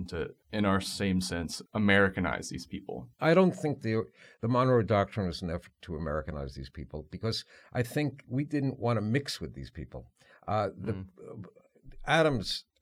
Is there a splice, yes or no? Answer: yes